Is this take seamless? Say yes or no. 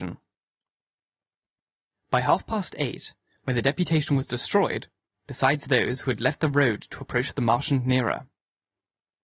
no